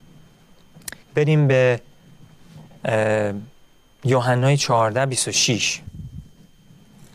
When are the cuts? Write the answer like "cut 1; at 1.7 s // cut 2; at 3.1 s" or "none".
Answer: cut 1; at 1.0 s